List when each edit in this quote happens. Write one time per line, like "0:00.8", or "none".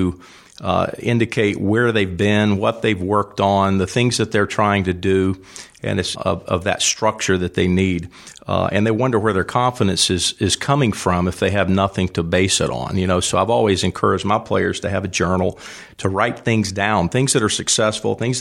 0:06.2